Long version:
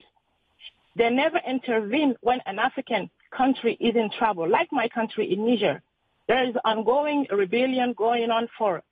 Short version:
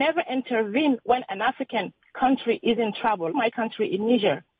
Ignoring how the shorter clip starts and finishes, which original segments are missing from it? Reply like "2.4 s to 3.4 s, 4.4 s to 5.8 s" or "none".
4.5 s to 4.7 s